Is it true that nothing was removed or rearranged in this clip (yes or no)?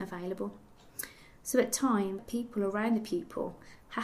no